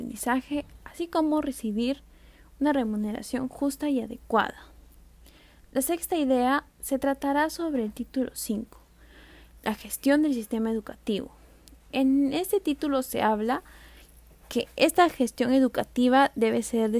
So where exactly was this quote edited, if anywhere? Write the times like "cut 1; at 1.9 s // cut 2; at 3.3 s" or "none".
none